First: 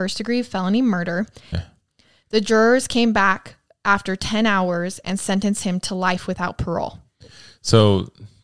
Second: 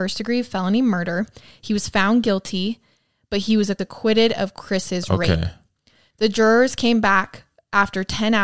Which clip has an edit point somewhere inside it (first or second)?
first